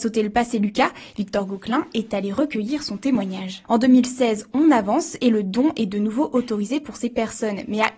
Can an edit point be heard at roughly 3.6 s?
yes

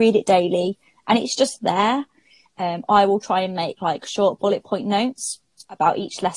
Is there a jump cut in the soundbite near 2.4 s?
yes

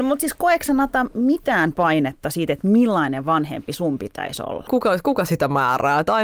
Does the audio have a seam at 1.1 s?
no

